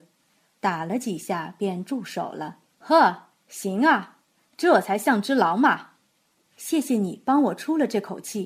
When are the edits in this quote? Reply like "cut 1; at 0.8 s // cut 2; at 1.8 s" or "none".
cut 1; at 2.7 s // cut 2; at 6.4 s

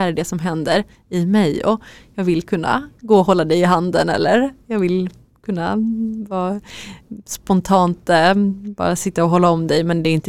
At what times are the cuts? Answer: none

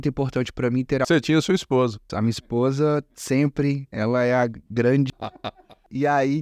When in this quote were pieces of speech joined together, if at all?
cut 1; at 2.1 s // cut 2; at 5.1 s

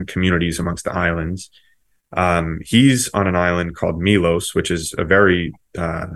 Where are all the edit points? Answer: none

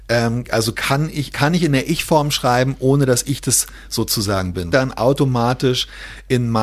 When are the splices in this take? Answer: cut 1; at 1.3 s // cut 2; at 4.7 s

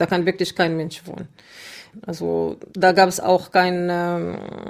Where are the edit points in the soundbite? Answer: cut 1; at 2.7 s

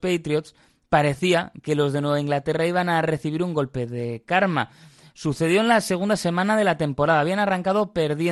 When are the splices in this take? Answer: none

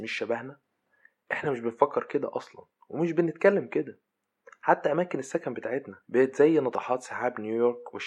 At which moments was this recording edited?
cut 1; at 6.0 s

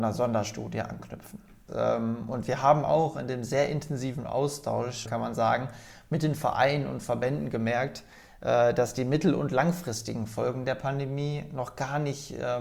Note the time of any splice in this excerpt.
cut 1; at 1.7 s // cut 2; at 5.0 s

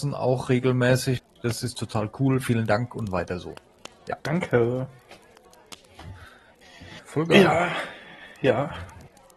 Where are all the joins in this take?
cut 1; at 4.2 s // cut 2; at 7.0 s

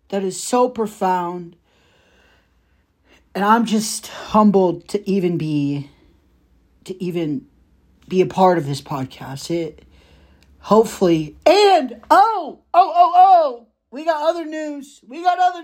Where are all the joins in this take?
none

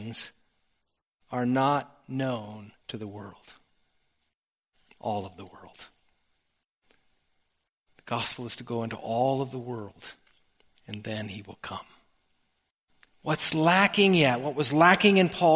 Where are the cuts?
cut 1; at 2.8 s

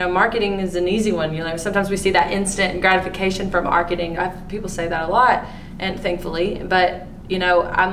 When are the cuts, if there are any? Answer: cut 1; at 4.2 s

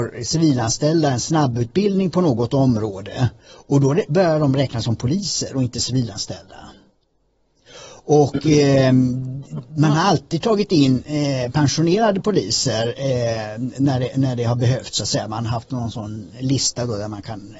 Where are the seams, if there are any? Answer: none

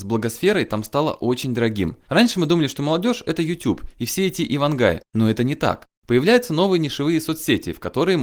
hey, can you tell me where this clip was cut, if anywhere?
cut 1; at 2.0 s // cut 2; at 5.9 s

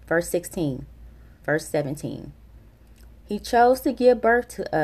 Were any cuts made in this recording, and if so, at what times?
cut 1; at 1.4 s // cut 2; at 3.2 s

